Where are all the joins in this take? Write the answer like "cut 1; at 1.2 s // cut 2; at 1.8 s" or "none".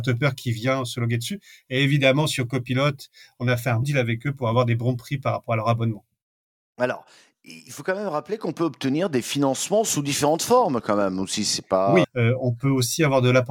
cut 1; at 3.8 s // cut 2; at 12.0 s